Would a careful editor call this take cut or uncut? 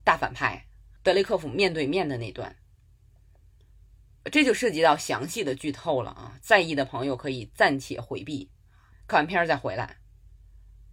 uncut